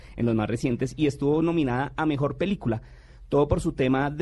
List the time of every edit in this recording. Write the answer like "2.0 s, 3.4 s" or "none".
none